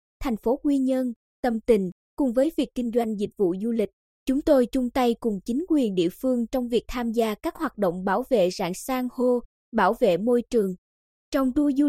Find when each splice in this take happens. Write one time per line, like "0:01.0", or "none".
none